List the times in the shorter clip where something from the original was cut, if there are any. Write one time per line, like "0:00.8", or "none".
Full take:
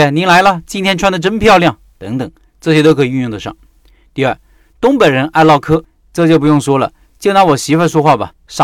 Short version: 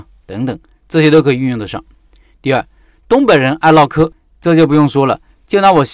none